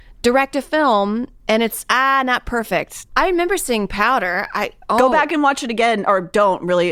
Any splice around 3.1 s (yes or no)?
yes